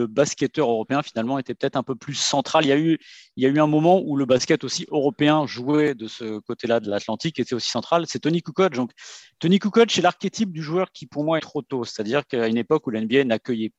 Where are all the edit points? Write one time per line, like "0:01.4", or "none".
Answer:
0:11.4